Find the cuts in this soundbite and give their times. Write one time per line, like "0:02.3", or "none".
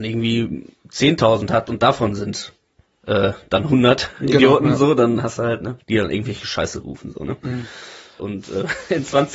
0:05.8
0:08.2